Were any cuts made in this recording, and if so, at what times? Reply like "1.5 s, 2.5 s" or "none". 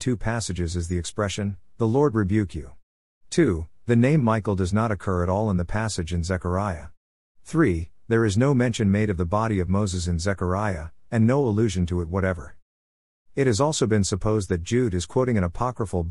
none